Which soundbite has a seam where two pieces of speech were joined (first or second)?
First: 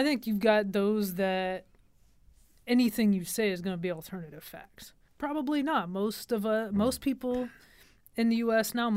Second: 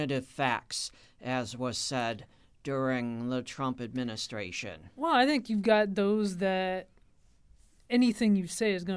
first